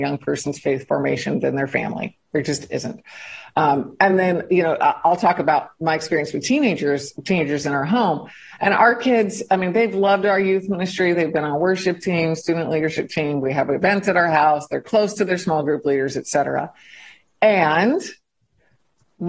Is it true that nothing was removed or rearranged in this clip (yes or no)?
yes